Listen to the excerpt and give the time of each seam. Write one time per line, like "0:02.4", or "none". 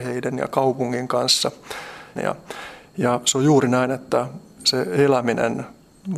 0:02.2